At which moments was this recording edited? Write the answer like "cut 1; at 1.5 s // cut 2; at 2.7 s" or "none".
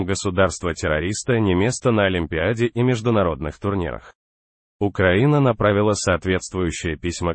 none